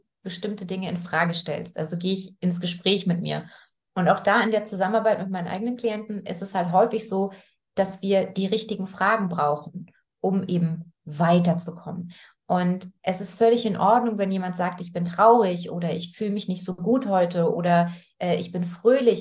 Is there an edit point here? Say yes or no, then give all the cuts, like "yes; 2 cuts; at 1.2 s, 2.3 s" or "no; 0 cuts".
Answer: no; 0 cuts